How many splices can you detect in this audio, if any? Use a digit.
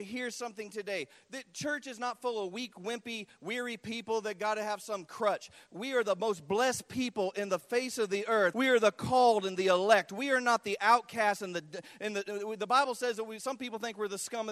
1